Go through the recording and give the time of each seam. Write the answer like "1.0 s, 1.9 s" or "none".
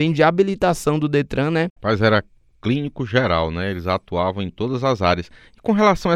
1.7 s